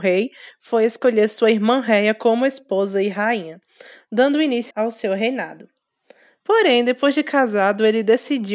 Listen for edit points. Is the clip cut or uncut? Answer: cut